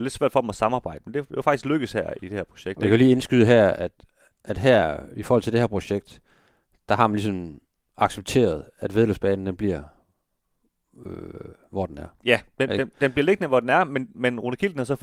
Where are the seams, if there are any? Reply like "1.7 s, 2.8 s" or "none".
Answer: none